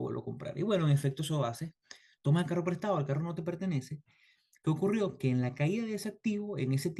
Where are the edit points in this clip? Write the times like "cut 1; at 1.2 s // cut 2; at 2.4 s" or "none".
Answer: cut 1; at 4.5 s